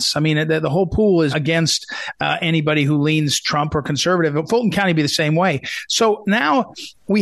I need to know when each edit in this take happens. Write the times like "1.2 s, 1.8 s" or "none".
1.3 s

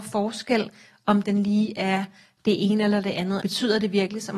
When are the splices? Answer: 3.4 s

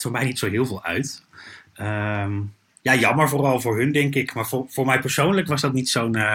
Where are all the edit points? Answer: none

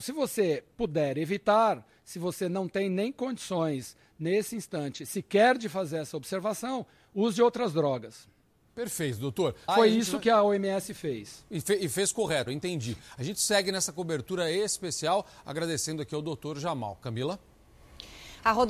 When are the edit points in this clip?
9.7 s, 12.5 s

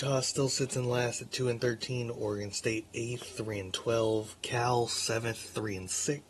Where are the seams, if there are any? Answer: none

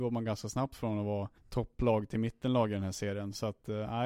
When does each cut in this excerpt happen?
1.4 s

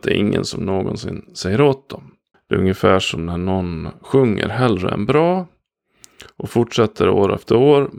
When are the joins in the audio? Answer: 2.3 s

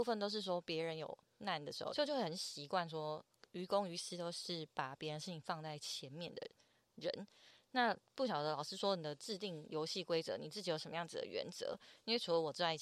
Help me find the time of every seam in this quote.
1.9 s

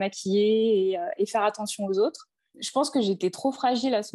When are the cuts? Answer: 2.5 s

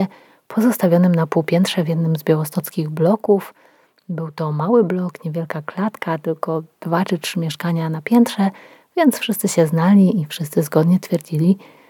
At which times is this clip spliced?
none

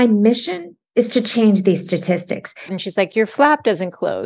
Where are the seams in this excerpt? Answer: 2.7 s

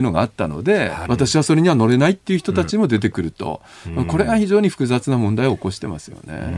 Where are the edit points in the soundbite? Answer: 1.1 s

